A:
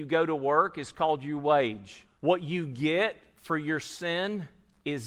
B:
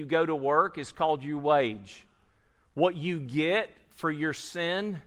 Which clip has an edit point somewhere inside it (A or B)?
A